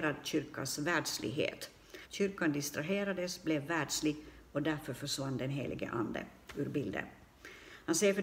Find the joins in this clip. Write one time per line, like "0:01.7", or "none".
0:02.0